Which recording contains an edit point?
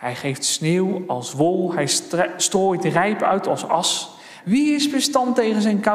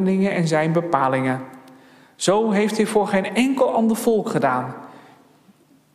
first; 1 cut; at 4.4 s

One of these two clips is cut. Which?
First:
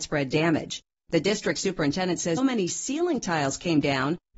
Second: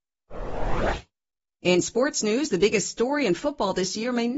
first; 1 cut; at 2.4 s

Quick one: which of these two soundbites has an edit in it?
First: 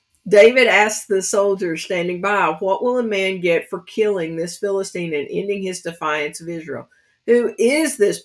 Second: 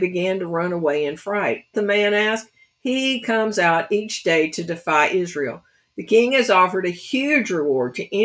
second; 1 cut; at 1.7 s

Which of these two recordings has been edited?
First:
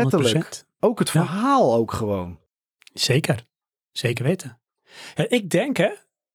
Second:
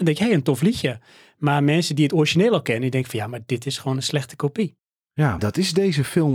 second; 1 cut; at 5.4 s

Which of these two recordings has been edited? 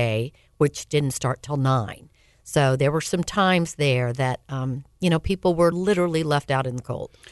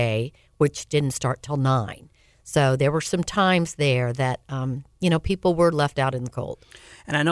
second; 1 cut; at 5.7 s

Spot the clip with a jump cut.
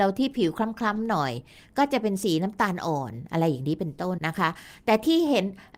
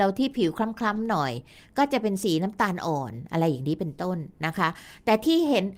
first; 1 cut; at 4.2 s

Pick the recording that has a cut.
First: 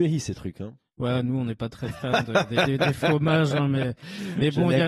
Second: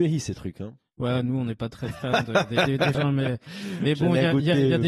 second; 1 cut; at 2.9 s

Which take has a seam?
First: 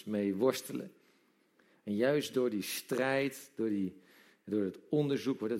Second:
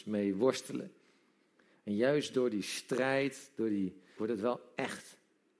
second; 1 cut; at 4.2 s

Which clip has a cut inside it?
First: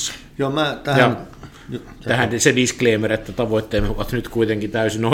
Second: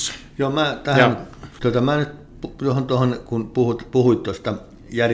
second; 1 cut; at 1.6 s

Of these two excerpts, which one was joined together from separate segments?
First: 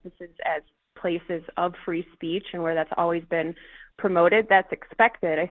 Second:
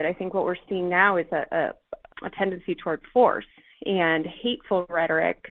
second; 1 cut; at 2.1 s

